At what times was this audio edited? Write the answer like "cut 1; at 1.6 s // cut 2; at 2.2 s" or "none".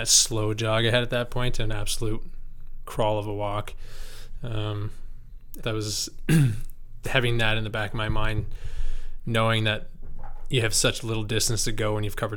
cut 1; at 5.6 s // cut 2; at 7.0 s